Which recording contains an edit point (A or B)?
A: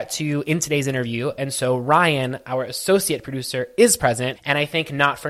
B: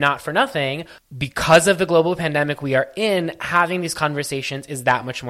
A